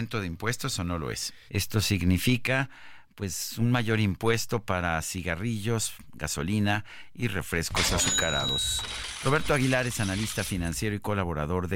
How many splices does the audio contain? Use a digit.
1